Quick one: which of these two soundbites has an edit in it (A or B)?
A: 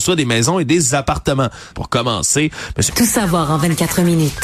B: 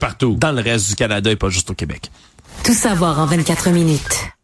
A